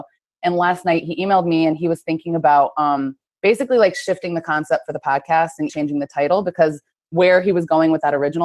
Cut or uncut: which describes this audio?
cut